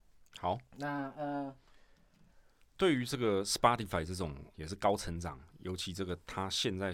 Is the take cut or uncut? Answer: cut